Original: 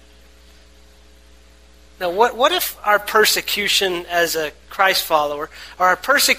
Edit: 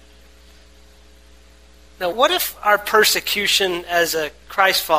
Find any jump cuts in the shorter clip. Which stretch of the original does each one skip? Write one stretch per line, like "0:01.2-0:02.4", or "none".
0:02.1-0:02.3